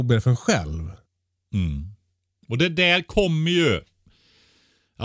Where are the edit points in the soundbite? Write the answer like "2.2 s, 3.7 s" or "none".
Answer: none